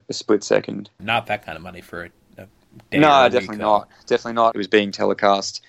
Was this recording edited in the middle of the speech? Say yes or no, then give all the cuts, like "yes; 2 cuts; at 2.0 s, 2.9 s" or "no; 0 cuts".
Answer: yes; 2 cuts; at 1.0 s, 4.5 s